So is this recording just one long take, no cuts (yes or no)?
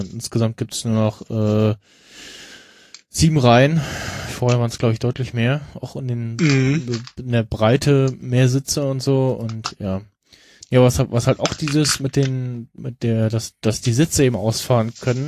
yes